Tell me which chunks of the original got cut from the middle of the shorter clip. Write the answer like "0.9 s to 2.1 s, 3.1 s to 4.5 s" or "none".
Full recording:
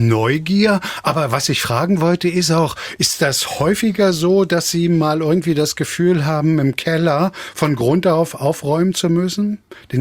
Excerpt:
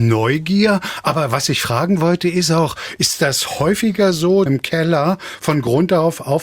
4.5 s to 6.6 s